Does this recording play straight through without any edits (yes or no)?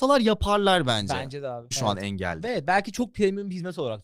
no